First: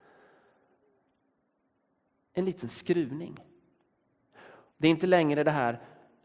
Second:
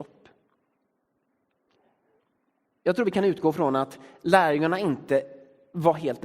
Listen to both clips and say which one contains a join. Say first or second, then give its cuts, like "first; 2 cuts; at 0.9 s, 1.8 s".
first; 1 cut; at 4.7 s